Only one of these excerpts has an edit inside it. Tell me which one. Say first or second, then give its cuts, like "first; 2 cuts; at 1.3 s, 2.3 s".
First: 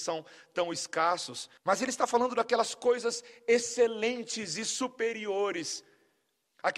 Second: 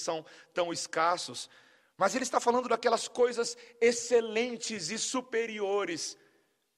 first; 1 cut; at 1.6 s